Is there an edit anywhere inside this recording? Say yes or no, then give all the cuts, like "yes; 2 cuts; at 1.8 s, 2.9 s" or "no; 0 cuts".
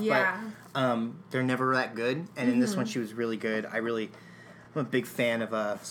no; 0 cuts